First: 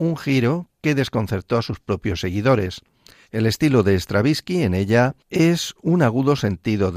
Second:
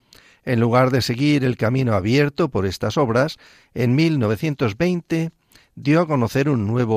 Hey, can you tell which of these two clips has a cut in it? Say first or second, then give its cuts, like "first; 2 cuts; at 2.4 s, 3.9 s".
first; 2 cuts; at 3.2 s, 5.2 s